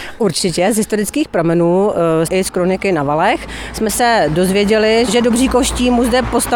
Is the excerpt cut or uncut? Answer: cut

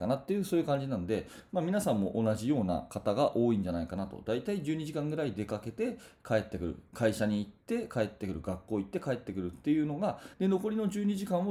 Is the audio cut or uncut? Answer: cut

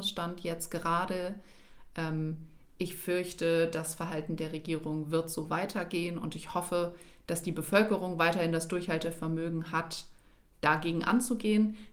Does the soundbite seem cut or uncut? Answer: uncut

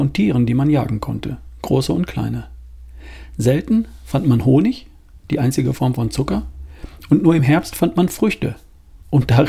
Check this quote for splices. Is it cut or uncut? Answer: uncut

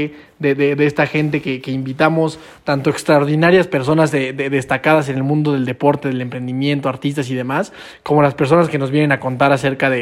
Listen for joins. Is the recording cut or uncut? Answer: uncut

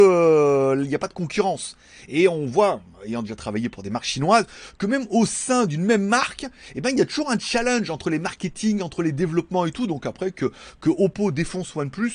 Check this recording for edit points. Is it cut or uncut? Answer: uncut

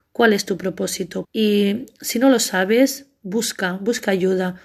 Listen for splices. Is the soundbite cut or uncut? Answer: cut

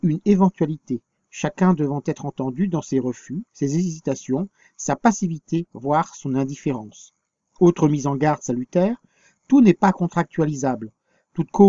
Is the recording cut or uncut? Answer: uncut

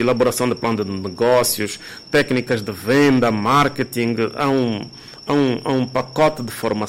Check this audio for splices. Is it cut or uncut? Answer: uncut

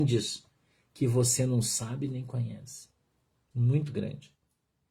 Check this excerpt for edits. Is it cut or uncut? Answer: cut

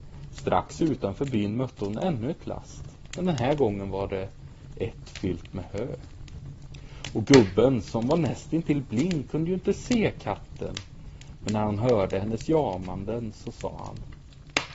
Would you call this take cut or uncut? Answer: uncut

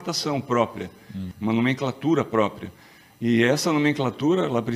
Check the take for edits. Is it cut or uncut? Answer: cut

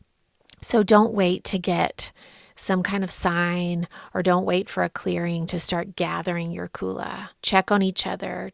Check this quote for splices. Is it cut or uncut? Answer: cut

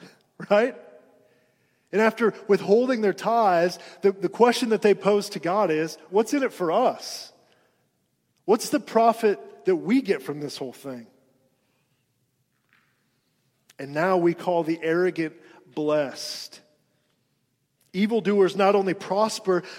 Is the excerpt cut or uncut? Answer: cut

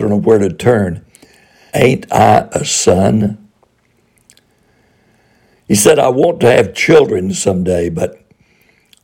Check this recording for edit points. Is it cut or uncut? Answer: cut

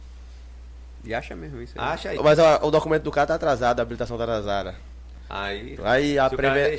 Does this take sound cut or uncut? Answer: cut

